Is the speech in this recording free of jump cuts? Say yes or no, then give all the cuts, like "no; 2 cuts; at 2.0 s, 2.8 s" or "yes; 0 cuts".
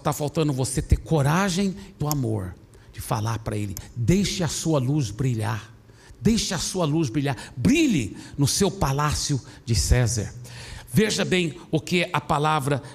no; 1 cut; at 2.0 s